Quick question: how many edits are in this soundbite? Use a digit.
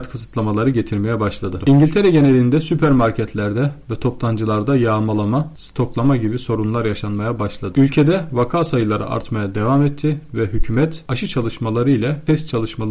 2